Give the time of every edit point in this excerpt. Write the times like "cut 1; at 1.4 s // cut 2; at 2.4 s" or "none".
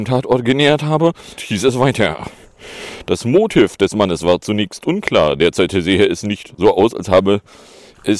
cut 1; at 1.4 s

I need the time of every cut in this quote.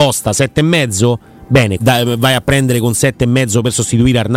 cut 1; at 1.8 s

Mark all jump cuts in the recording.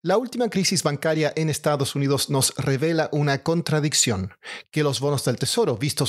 none

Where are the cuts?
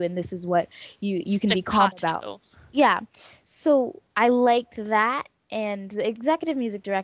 none

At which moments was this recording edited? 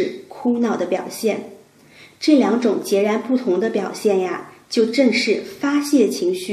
none

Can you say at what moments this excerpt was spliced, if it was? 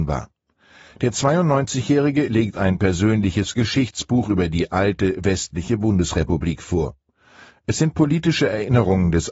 cut 1; at 7.5 s

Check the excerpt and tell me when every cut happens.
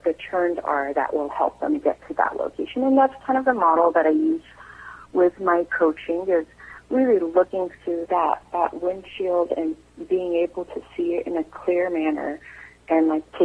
cut 1; at 8.0 s

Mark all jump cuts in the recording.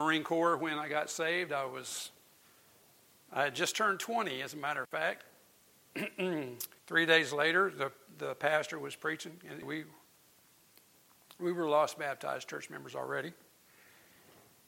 cut 1; at 6.8 s // cut 2; at 9.6 s

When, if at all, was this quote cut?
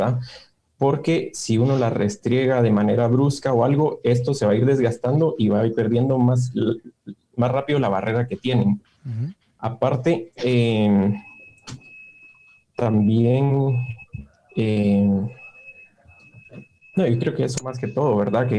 none

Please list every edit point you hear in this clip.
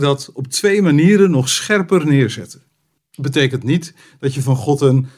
cut 1; at 3.0 s

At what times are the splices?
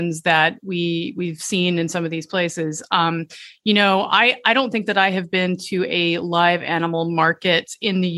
none

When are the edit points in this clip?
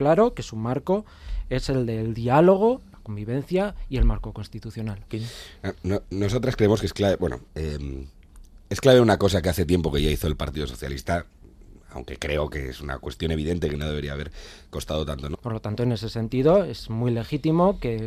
cut 1; at 5.1 s // cut 2; at 7.5 s // cut 3; at 15.3 s

